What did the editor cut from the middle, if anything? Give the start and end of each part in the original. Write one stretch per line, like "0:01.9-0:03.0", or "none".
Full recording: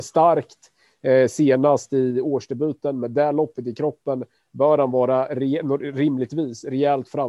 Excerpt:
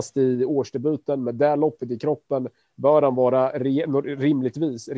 none

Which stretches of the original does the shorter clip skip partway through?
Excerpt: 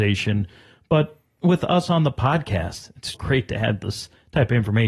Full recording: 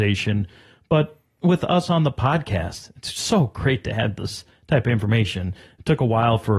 0:03.1-0:03.5

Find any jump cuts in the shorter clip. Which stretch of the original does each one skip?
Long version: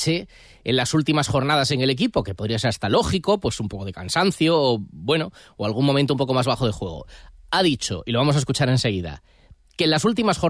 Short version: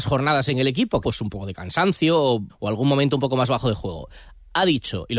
0:02.2-0:03.4
0:04.9-0:05.5

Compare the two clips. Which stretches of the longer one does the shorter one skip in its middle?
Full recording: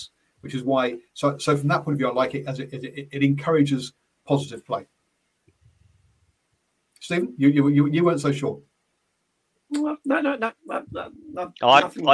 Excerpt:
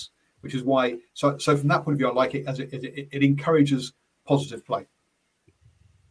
none

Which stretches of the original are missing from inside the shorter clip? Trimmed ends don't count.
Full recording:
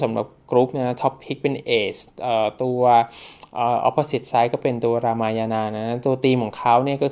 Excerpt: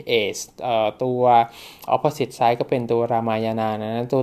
0:03.5-0:03.8

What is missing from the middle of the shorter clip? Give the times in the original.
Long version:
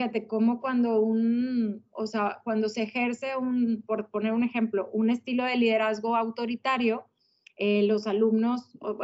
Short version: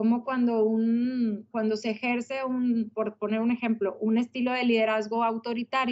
0:01.9-0:02.4

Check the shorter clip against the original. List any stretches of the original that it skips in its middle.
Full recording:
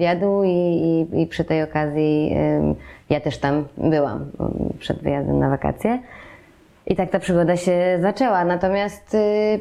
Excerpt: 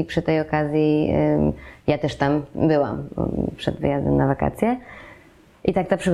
none

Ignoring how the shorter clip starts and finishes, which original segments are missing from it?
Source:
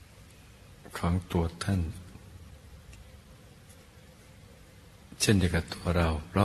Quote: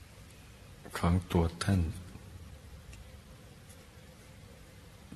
none

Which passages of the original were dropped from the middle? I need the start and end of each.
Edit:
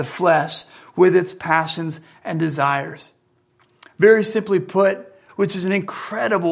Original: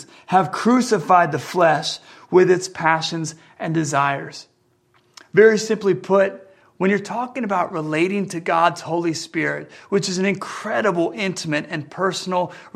0:06.6-0:09.8

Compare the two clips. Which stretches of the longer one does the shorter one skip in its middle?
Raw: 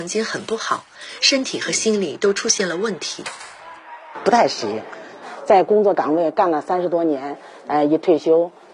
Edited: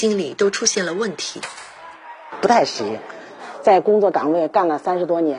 none

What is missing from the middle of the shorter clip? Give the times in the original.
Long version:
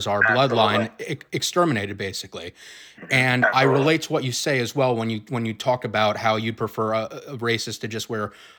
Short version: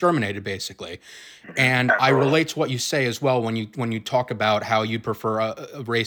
none

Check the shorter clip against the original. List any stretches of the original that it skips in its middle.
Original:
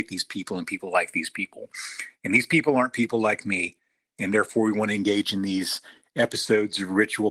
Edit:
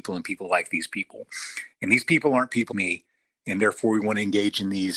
0:03.1-0:03.4

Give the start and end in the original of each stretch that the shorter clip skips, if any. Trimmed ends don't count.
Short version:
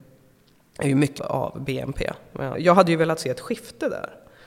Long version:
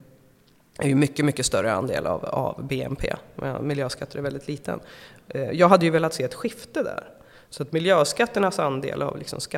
0:01.2-0:02.2
0:03.6-0:05.5

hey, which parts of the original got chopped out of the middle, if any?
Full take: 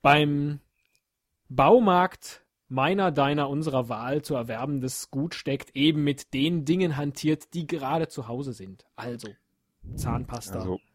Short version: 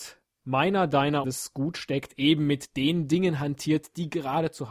0:03.5-0:04.8

